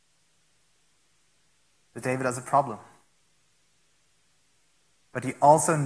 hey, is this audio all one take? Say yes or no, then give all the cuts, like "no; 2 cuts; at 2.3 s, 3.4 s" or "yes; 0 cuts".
yes; 0 cuts